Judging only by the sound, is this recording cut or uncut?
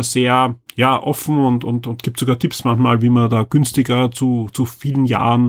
uncut